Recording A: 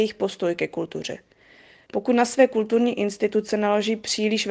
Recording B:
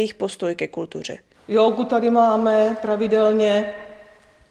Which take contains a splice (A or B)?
B